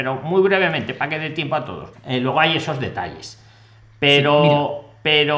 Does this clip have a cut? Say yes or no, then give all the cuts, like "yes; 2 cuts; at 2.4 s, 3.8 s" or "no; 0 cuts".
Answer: yes; 1 cut; at 1.9 s